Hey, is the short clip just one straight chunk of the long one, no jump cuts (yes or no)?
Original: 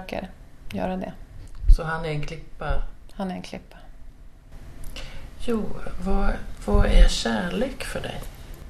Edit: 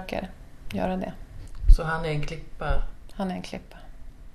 yes